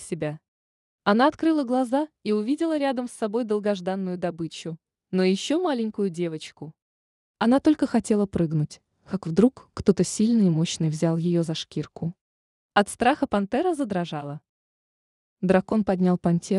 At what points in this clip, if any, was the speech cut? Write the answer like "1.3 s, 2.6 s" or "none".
12.5 s